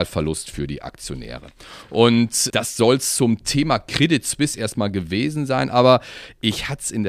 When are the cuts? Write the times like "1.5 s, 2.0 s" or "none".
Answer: 2.5 s